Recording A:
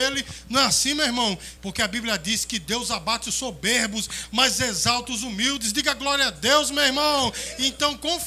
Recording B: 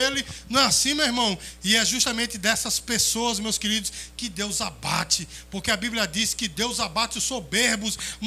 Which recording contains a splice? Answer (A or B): A